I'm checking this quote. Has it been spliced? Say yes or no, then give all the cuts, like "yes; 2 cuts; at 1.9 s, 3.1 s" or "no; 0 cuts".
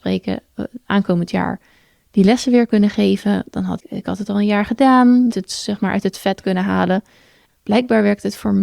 yes; 3 cuts; at 3.8 s, 5.3 s, 7.5 s